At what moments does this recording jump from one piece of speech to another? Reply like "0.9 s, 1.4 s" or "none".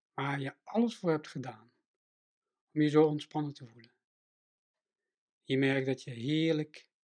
none